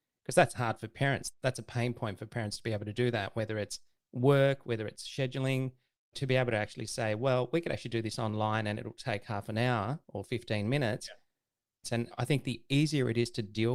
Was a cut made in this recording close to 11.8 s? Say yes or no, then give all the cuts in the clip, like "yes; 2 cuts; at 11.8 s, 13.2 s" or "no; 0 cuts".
yes; 1 cut; at 11.8 s